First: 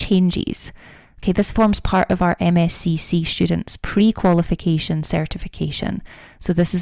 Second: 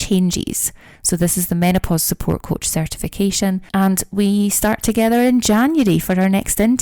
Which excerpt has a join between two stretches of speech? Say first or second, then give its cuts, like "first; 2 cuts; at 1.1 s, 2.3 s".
second; 2 cuts; at 1.0 s, 3.7 s